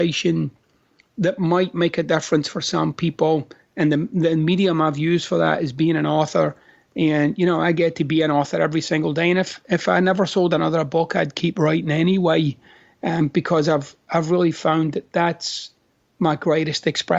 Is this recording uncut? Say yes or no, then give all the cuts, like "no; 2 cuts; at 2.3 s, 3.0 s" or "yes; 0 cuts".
yes; 0 cuts